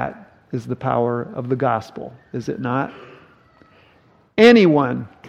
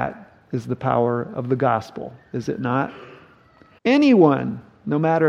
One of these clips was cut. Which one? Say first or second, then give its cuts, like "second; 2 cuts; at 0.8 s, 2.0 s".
second; 1 cut; at 3.8 s